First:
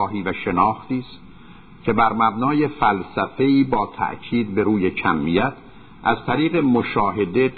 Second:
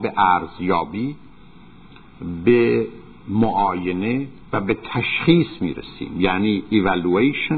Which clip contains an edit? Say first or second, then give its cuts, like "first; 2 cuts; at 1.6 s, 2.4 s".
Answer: second; 1 cut; at 4.4 s